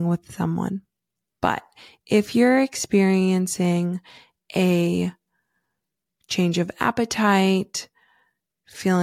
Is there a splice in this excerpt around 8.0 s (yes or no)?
no